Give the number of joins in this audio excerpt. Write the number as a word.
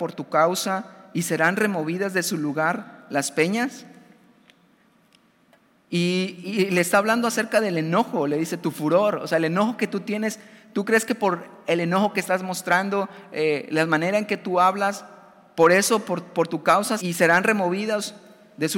one